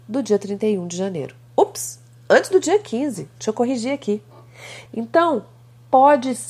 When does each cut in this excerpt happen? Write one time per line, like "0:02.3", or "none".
0:04.9